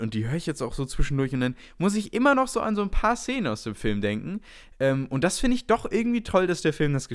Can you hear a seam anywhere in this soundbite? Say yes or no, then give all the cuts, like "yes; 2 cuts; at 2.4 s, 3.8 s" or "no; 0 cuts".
no; 0 cuts